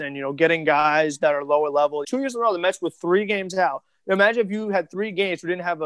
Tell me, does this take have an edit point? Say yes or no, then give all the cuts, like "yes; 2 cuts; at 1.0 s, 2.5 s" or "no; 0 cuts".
yes; 1 cut; at 2.0 s